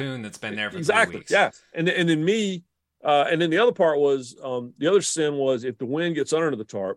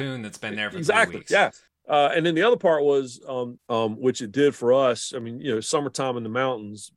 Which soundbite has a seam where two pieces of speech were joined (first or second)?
second